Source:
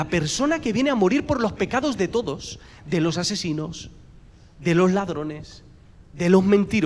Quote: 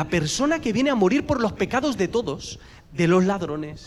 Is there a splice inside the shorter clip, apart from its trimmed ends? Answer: yes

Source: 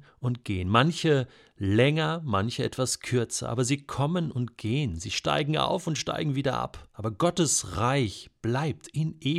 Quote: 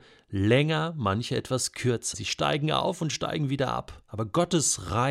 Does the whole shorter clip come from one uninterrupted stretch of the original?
no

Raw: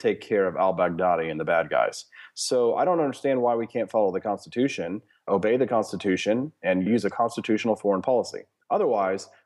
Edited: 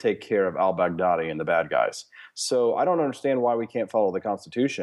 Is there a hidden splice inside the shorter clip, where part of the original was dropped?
no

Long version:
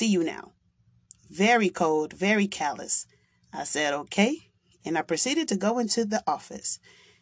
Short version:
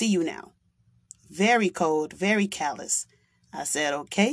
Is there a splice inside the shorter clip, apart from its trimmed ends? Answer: no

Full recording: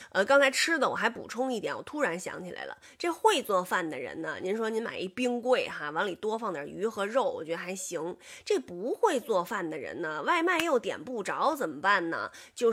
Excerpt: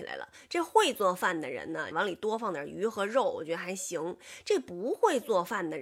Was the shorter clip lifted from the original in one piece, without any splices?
no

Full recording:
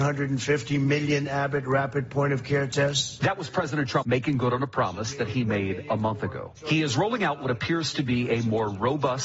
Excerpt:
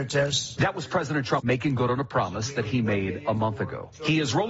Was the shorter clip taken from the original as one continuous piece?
yes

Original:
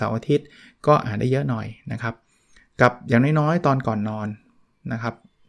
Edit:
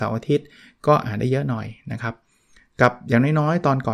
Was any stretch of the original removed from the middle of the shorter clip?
no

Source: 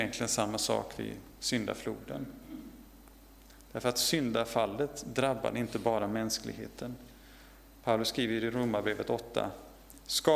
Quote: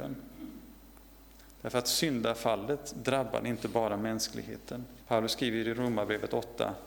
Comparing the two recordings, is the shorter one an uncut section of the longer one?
no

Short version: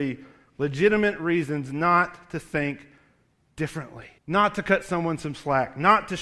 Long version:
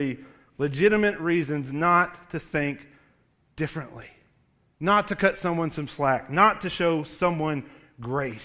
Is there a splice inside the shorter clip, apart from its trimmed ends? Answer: yes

